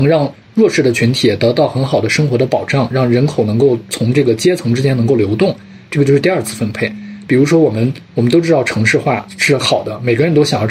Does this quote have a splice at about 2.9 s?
no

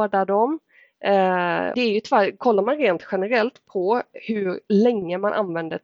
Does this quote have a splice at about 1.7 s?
yes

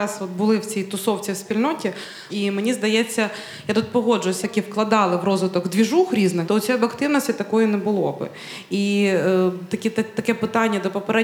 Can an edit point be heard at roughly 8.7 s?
no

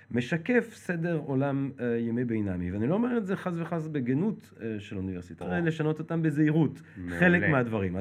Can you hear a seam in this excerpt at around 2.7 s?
no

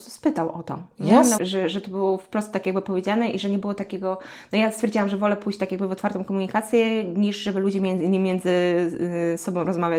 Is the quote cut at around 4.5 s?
no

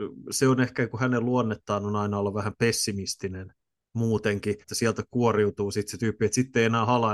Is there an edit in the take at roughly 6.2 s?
no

